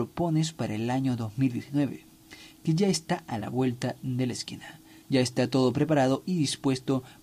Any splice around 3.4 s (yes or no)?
no